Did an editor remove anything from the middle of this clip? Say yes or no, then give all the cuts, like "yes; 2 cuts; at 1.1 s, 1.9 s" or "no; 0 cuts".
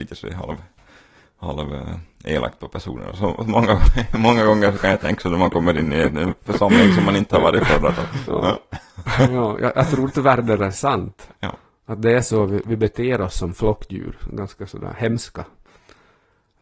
no; 0 cuts